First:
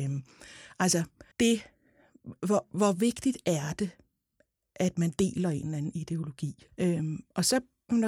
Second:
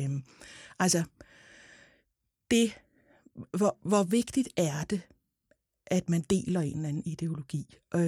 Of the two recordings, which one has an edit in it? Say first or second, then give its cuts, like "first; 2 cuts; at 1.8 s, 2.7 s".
first; 2 cuts; at 1.3 s, 6.7 s